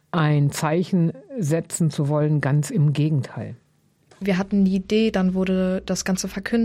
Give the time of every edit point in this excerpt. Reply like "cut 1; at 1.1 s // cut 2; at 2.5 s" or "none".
none